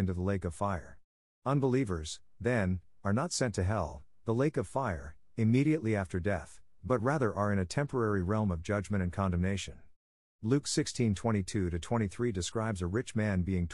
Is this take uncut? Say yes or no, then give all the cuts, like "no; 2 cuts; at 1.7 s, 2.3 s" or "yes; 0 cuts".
no; 1 cut; at 10.2 s